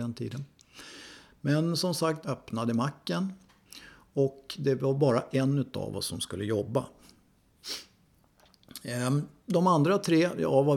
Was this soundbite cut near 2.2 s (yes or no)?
yes